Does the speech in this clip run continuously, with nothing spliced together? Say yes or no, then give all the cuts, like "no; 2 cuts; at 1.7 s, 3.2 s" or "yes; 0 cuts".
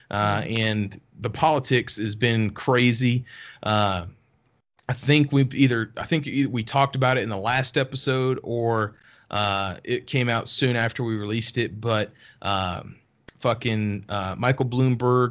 yes; 0 cuts